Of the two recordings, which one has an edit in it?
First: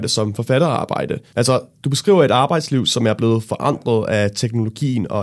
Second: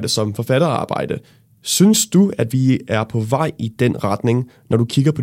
first; 1 cut; at 1.3 s

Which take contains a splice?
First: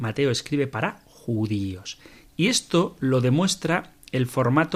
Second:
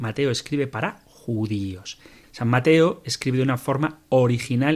second; 1 cut; at 2.2 s

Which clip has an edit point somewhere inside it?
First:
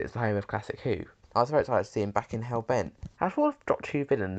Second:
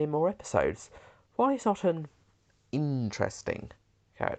first; 2 cuts; at 1.2 s, 3.1 s

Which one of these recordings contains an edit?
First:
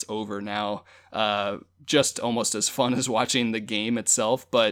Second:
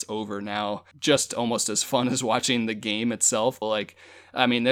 second; 2 cuts; at 0.9 s, 3.6 s

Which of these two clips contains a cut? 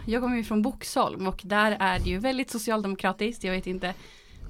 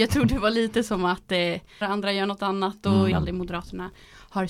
second; 2 cuts; at 1.8 s, 3.1 s

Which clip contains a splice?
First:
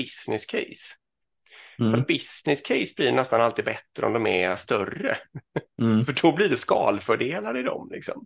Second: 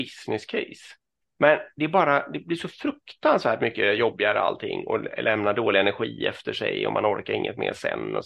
second; 1 cut; at 1.3 s

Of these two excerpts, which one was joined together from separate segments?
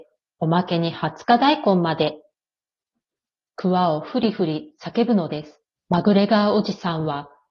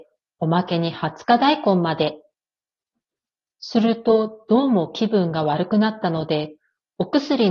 first; 2 cuts; at 3.5 s, 5.7 s

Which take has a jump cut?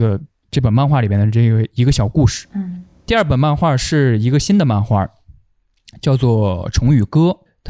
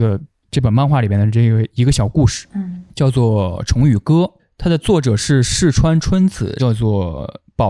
second; 2 cuts; at 2.9 s, 6.6 s

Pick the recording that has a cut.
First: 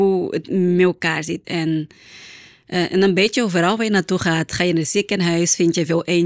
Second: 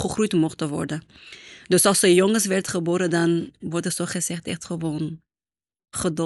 first; 1 cut; at 1.4 s

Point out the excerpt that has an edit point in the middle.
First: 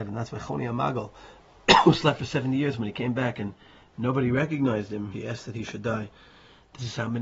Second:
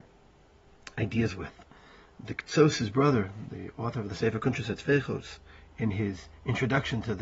first; 1 cut; at 5.1 s

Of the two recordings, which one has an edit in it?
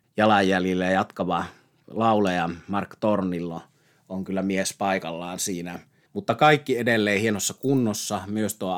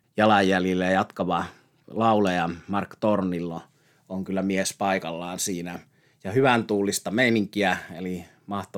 first; 1 cut; at 6.1 s

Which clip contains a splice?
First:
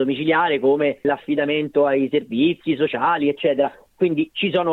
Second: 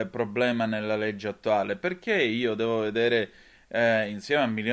first; 1 cut; at 1.0 s

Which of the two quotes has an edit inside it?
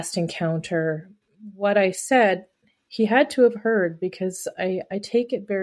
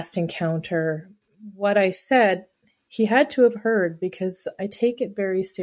second; 1 cut; at 4.5 s

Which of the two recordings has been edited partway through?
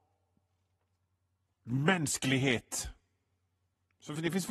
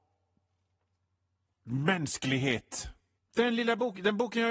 second; 1 cut; at 3.2 s

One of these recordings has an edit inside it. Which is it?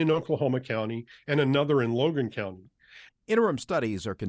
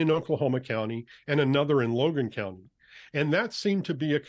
first; 1 cut; at 3.1 s

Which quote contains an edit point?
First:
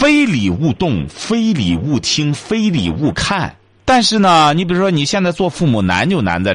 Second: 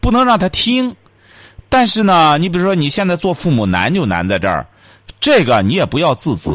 first; 1 cut; at 3.8 s

